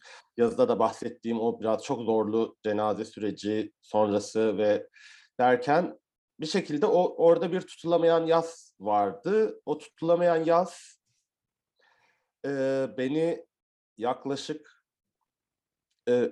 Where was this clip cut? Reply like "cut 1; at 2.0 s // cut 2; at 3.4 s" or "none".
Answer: none